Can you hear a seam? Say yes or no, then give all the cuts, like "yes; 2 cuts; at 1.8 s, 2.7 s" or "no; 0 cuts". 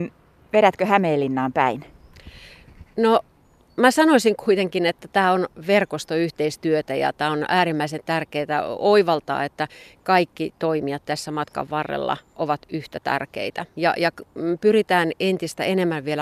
no; 0 cuts